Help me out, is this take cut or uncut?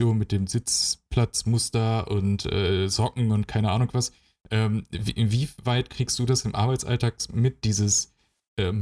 uncut